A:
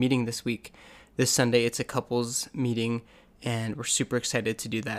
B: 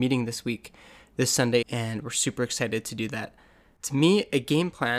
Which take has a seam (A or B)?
B